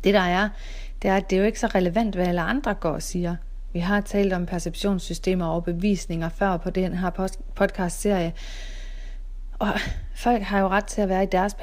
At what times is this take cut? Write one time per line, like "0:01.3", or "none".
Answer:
none